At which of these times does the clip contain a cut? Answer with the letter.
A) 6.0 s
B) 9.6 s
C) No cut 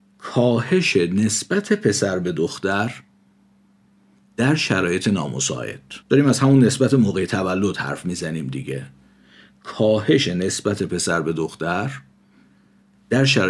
A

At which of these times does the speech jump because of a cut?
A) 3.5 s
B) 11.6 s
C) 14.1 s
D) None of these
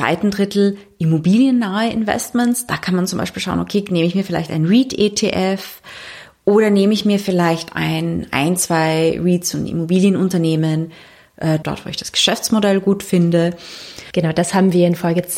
B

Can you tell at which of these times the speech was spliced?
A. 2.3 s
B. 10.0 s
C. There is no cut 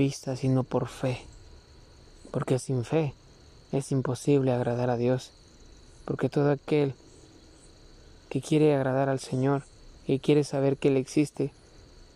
B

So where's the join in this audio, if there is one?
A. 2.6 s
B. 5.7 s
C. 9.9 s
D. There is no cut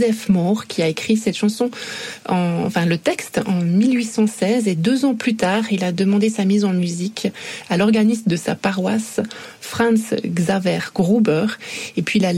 D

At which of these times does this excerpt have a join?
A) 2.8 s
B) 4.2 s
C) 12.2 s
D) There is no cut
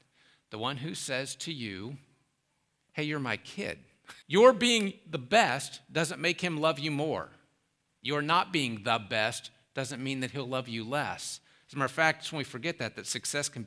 B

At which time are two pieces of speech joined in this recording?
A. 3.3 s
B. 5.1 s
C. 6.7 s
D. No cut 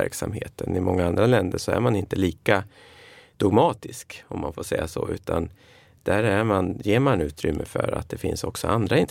D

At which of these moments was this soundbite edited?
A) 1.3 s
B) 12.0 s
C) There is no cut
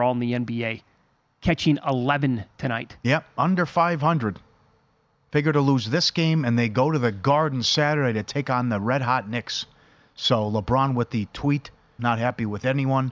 B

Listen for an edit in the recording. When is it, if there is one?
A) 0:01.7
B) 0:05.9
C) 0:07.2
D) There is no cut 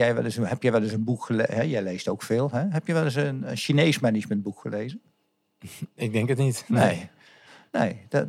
D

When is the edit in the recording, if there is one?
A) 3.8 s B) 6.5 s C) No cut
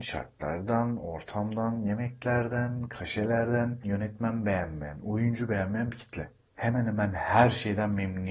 A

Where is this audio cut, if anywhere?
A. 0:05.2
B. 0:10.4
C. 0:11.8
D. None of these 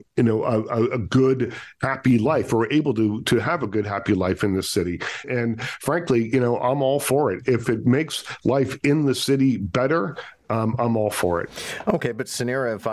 A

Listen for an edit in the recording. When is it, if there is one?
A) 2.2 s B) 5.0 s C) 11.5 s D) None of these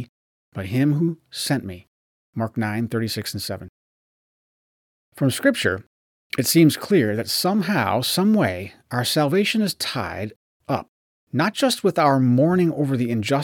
D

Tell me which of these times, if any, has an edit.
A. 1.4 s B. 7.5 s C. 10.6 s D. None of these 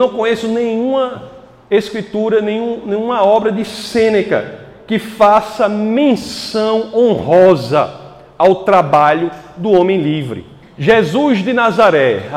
C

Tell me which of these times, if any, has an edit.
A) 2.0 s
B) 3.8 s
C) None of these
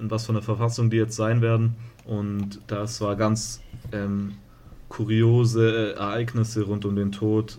A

